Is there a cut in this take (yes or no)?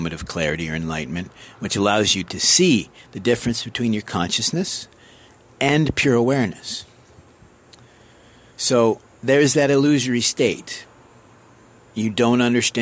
no